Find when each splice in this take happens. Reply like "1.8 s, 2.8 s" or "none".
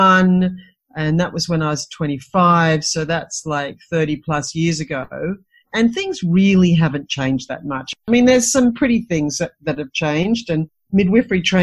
none